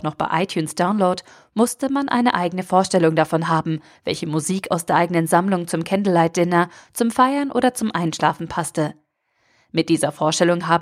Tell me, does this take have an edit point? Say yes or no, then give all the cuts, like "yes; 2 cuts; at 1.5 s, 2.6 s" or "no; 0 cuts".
no; 0 cuts